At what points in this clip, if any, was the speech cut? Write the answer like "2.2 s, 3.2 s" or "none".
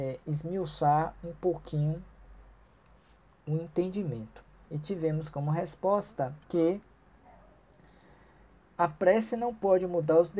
4.6 s, 6.4 s